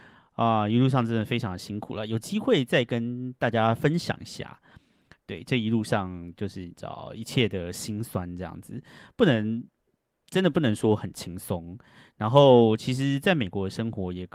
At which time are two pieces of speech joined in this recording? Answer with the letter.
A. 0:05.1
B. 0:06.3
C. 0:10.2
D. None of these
D